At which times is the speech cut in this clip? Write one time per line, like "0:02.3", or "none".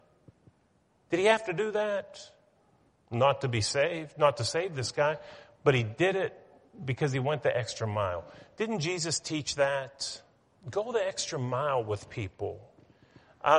0:02.9